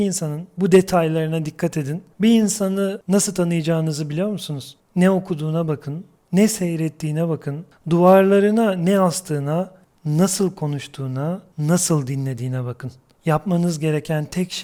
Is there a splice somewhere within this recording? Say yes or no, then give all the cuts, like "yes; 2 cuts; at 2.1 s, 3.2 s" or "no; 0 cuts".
yes; 1 cut; at 9.9 s